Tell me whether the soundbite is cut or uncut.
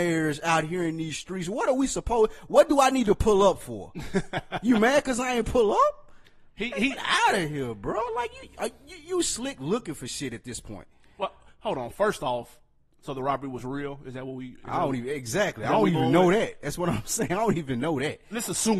uncut